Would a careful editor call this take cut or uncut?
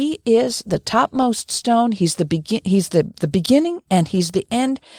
uncut